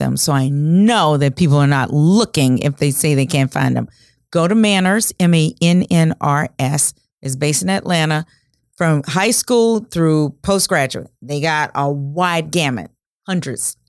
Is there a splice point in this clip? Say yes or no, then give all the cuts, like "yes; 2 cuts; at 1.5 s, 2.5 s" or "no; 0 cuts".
no; 0 cuts